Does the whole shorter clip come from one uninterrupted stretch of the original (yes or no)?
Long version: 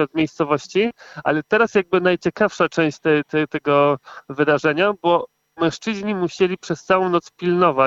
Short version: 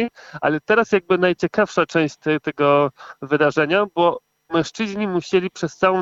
no